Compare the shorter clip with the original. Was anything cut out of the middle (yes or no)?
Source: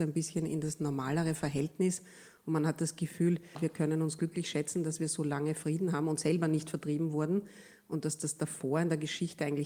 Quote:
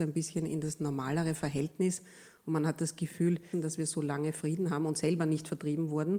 yes